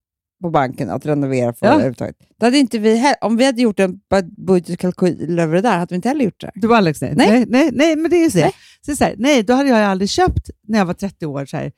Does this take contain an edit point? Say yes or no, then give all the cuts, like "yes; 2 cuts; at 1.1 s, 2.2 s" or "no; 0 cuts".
no; 0 cuts